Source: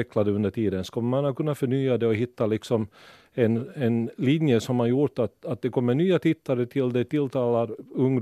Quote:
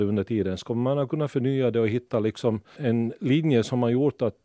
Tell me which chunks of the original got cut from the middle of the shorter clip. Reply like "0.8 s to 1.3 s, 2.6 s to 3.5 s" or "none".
3.0 s to 3.7 s